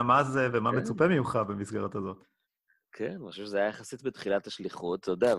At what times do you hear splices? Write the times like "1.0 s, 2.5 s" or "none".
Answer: none